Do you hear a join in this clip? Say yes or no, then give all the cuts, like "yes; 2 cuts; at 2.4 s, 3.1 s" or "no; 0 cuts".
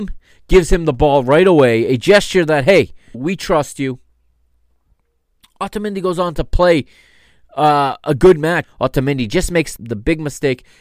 yes; 3 cuts; at 3.1 s, 8.6 s, 9.8 s